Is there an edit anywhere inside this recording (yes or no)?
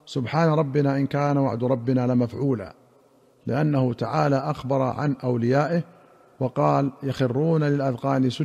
no